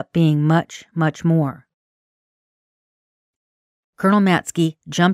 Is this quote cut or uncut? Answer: uncut